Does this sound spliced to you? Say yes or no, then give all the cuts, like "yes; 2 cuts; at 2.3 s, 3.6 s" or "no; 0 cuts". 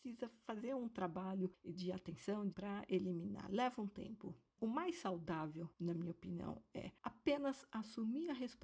yes; 1 cut; at 2.5 s